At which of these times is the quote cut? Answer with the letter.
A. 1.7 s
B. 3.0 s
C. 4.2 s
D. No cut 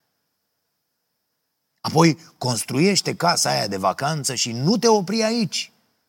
A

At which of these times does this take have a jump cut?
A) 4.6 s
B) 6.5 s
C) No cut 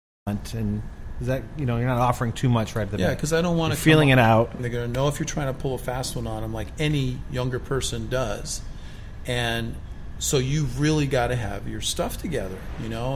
A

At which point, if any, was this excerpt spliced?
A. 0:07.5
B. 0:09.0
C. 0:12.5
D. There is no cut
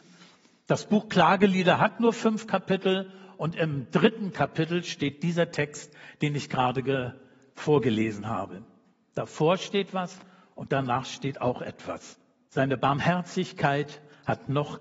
C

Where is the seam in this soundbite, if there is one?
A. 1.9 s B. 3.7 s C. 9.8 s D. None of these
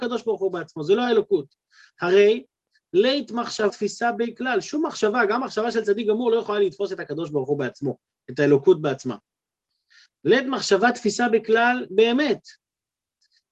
B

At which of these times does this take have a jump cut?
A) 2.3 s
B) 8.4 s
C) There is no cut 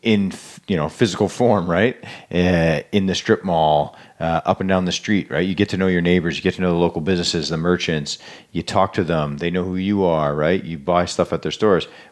C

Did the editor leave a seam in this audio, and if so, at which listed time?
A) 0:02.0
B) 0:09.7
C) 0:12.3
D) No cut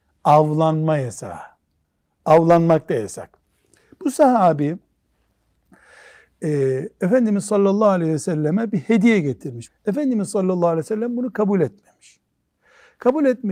B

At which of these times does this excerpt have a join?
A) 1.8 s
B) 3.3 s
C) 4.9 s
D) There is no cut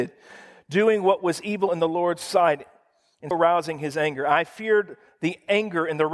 B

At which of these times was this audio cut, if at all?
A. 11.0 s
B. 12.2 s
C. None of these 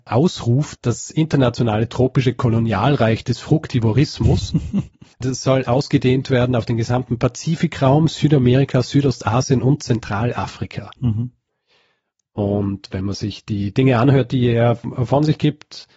A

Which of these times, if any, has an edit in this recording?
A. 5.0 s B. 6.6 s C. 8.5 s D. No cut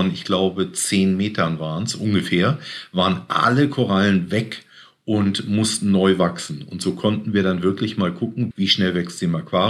C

